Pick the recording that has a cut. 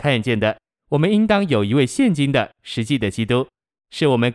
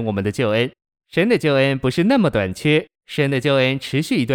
second; 1 cut; at 3.0 s

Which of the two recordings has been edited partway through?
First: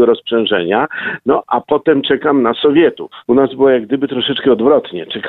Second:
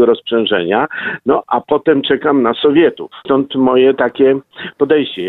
second; 1 cut; at 3.2 s

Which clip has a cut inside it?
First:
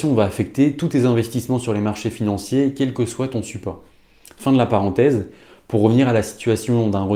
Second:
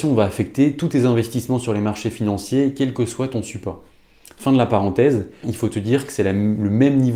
second; 1 cut; at 5.4 s

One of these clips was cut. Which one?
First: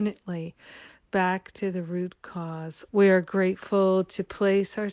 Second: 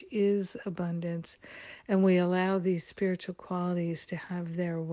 first; 1 cut; at 2.9 s

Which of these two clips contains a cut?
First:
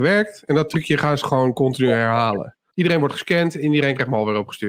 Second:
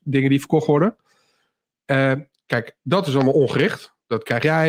first; 1 cut; at 2.7 s

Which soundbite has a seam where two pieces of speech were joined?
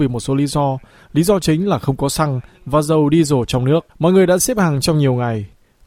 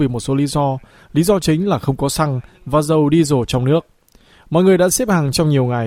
first; 1 cut; at 3.9 s

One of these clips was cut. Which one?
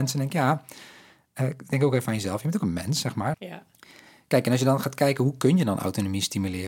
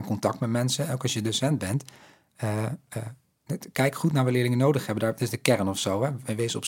first; 1 cut; at 3.3 s

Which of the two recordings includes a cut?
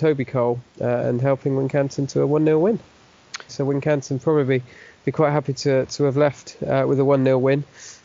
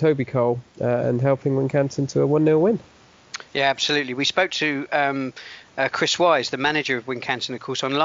first; 1 cut; at 3.5 s

